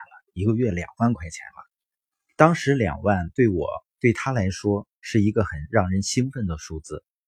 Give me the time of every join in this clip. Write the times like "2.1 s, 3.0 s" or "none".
none